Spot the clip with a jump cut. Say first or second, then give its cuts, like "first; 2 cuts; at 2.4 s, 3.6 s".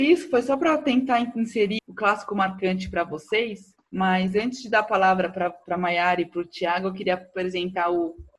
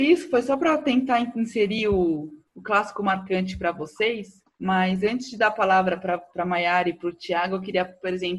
first; 1 cut; at 1.8 s